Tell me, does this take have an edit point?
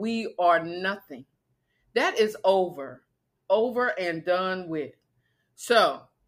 no; 0 cuts

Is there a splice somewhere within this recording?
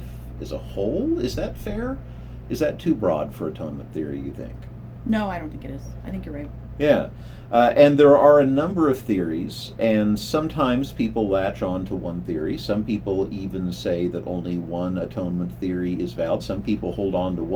yes; 2 cuts; at 9.8 s, 16.4 s

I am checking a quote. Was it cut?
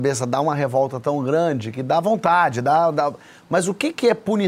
no; 0 cuts

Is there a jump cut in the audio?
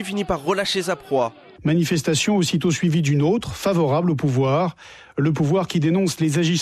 yes; 1 cut; at 1.6 s

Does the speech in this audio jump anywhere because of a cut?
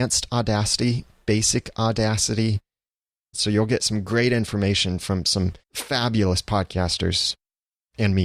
yes; 2 cuts; at 3.3 s, 5.6 s

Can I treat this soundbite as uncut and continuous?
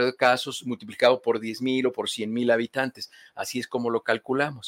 yes; 0 cuts

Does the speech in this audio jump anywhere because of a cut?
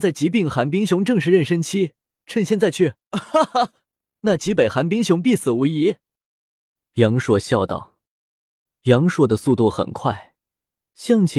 yes; 1 cut; at 2.2 s

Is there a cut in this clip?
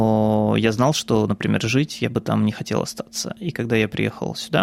no; 0 cuts

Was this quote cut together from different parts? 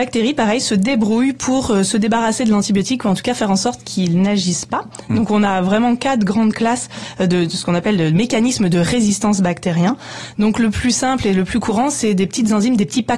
no; 0 cuts

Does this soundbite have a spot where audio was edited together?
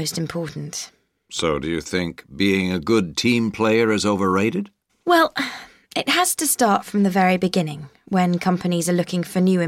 yes; 1 cut; at 4.9 s

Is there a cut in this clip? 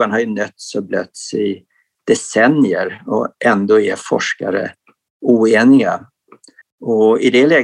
yes; 1 cut; at 6.6 s

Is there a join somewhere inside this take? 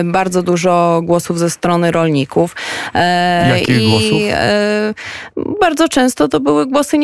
no; 0 cuts

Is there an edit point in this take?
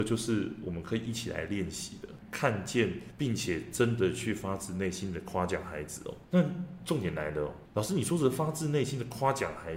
yes; 1 cut; at 2.2 s

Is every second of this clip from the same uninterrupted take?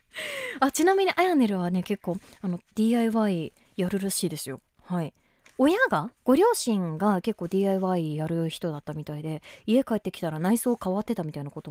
no; 1 cut; at 6.2 s

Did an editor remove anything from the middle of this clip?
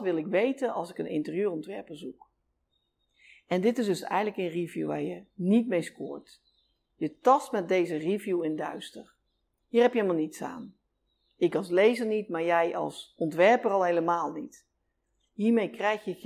no; 0 cuts

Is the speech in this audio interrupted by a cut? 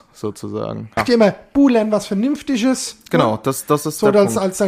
yes; 1 cut; at 1.0 s

